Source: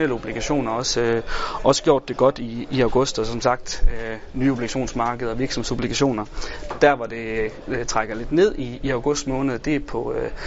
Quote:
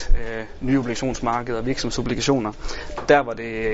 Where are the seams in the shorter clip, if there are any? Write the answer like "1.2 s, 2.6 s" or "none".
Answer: none